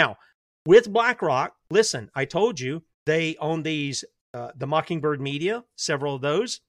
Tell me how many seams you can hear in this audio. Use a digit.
1